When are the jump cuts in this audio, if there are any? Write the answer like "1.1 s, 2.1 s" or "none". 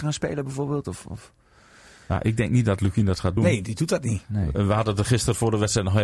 none